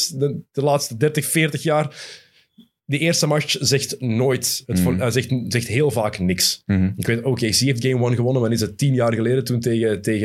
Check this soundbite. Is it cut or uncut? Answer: uncut